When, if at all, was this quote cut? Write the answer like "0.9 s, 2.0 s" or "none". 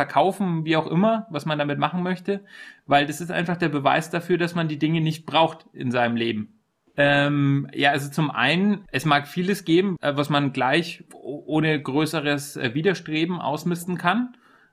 6.9 s, 8.9 s, 10.0 s